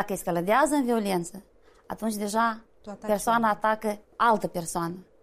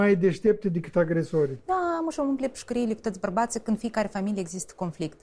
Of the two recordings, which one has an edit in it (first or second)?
second